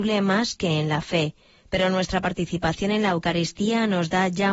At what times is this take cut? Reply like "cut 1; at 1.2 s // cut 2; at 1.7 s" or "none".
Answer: none